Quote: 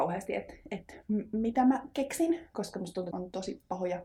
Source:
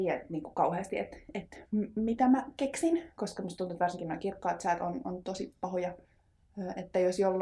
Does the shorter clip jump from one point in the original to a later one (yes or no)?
yes